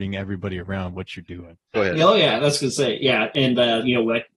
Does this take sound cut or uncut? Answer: cut